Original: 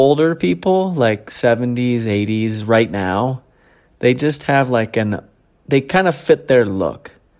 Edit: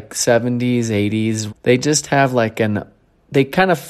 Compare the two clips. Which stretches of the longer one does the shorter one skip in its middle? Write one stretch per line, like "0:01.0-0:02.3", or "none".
0:02.7-0:03.9